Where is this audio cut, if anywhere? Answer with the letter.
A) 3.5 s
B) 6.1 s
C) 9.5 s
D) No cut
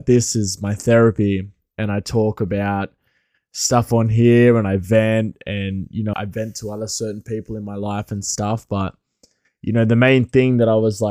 B